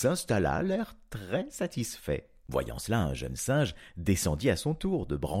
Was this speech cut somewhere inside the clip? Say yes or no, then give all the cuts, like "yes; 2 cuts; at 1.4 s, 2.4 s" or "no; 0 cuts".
no; 0 cuts